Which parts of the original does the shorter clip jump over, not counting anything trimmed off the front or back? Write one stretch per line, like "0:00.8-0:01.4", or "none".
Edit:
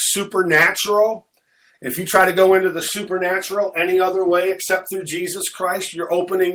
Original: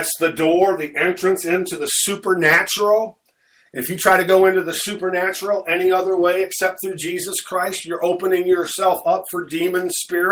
none